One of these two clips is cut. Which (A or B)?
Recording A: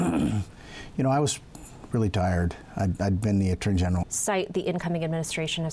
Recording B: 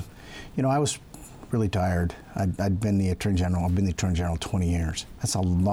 A